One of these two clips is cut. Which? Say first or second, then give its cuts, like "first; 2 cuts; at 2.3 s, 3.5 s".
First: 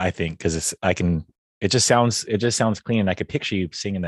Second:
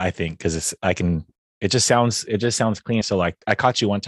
second; 1 cut; at 3.0 s